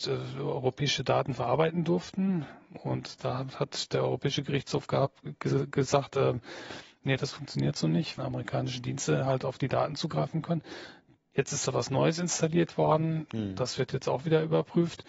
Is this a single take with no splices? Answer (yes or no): no